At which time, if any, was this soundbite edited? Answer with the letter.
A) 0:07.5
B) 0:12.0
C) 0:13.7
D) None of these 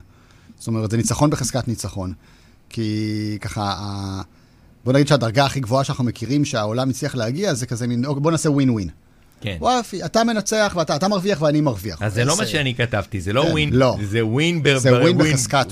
C